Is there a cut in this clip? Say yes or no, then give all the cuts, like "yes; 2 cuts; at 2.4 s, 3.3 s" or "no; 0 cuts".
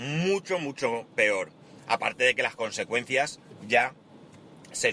no; 0 cuts